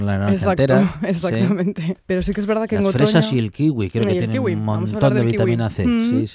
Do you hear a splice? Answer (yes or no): yes